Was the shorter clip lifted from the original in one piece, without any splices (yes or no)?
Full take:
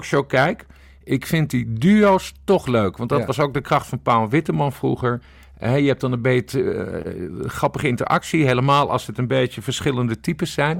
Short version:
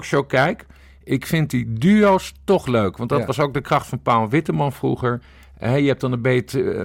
yes